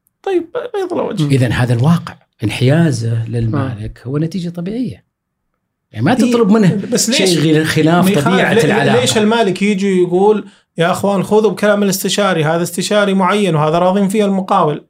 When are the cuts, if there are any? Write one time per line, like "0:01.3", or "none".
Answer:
none